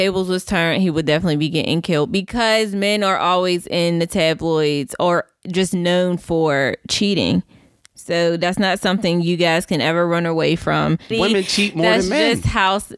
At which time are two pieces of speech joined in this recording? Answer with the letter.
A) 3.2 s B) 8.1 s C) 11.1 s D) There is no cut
C